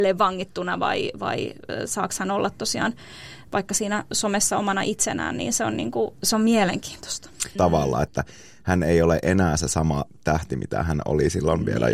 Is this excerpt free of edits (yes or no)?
no